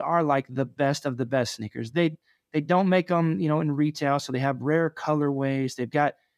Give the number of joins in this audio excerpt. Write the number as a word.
zero